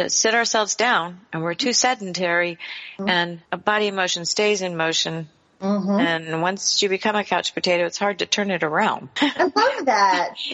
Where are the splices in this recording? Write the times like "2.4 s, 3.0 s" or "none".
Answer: 3.5 s, 9.2 s